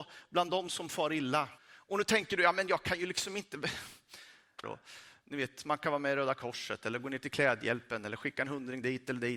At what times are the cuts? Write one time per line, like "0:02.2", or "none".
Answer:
0:01.6
0:04.6

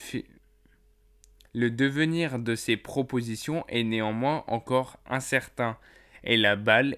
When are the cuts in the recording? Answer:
none

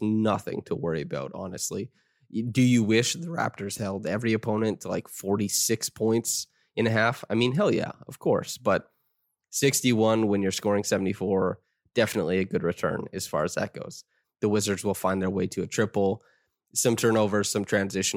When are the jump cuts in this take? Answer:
0:14.2

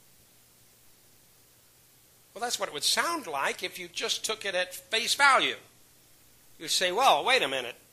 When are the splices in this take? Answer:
none

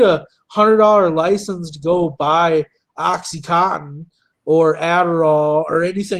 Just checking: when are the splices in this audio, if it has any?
none

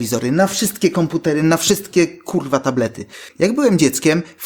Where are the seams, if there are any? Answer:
0:03.3

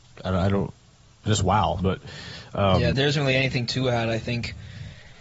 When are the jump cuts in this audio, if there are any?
0:01.8
0:02.9

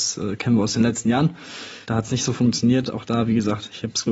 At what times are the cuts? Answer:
0:01.8

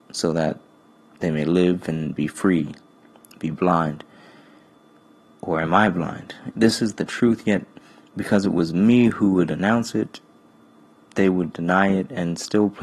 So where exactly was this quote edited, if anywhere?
0:06.5

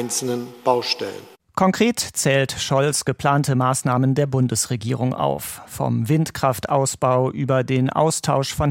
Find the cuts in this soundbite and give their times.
none

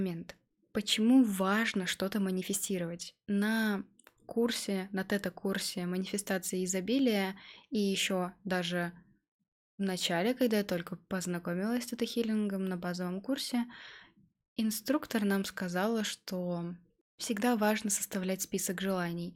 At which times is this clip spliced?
none

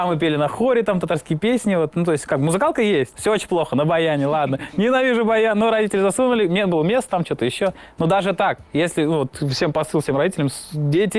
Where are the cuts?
0:03.1

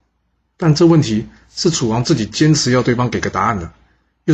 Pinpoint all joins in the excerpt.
none

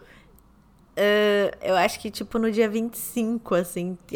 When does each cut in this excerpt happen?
none

